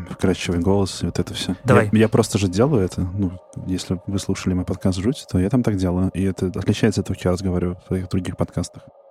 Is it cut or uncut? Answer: uncut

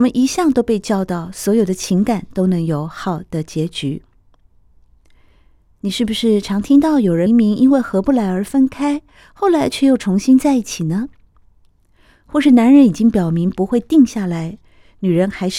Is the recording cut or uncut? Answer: cut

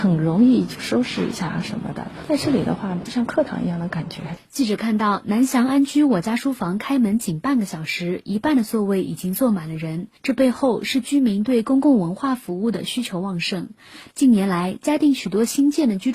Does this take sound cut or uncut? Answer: cut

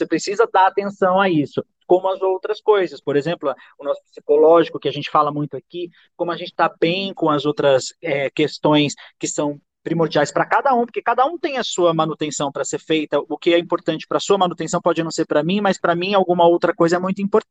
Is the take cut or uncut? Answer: uncut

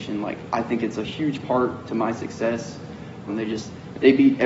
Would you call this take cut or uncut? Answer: cut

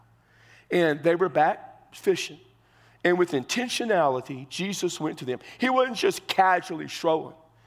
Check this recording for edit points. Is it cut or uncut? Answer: uncut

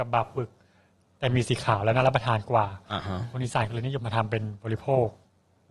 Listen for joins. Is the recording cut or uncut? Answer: cut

